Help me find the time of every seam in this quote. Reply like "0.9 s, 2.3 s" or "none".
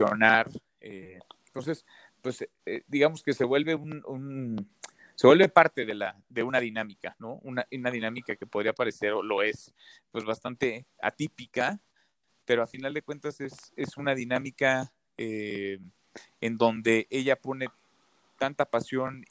none